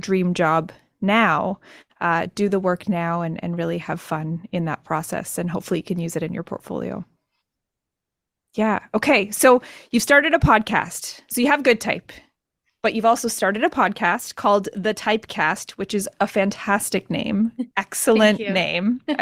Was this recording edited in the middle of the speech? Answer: no; 0 cuts

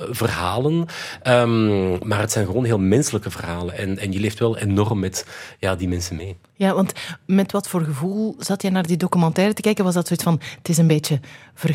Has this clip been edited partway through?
no; 0 cuts

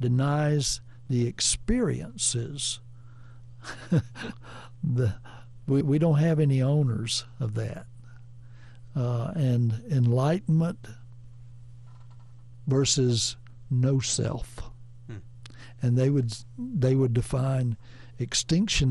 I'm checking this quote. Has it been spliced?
yes; 2 cuts; at 5.8 s, 8.9 s

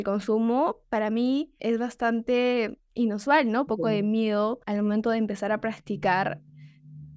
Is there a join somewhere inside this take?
yes; 1 cut; at 3.7 s

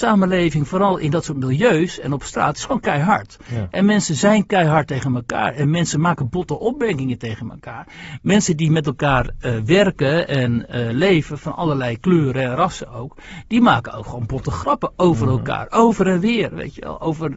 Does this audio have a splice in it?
no; 0 cuts

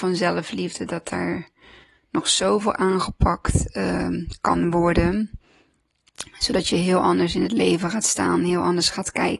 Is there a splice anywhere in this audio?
no; 0 cuts

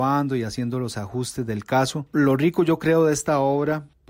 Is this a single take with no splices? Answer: yes; 0 cuts

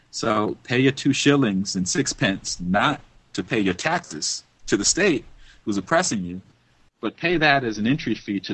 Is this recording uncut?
yes; 0 cuts

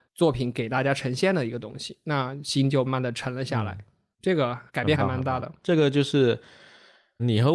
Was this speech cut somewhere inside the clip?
yes; 1 cut; at 2.9 s

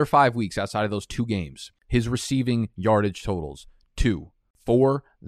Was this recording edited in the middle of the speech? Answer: no; 0 cuts

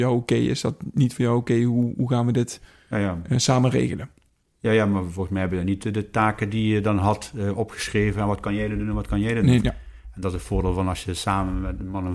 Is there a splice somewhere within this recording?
yes; 1 cut; at 9.6 s

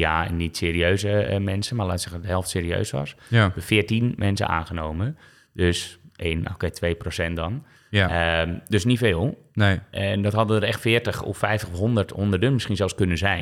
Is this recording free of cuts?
yes; 0 cuts

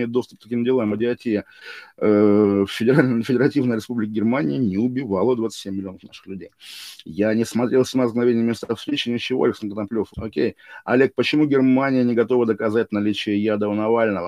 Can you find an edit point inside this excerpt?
yes; 1 cut; at 10.1 s

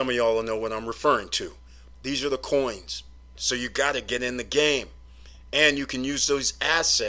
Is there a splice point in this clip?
yes; 2 cuts; at 1.9 s, 3.4 s

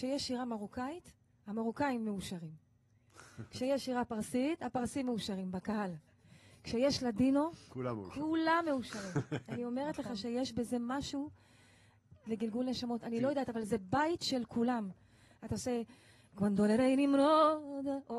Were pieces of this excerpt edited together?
yes; 1 cut; at 12.3 s

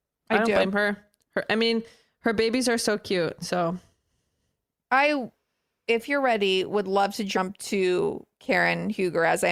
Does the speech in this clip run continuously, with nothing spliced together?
yes; 0 cuts

